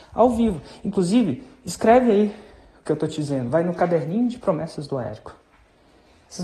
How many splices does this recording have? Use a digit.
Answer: 0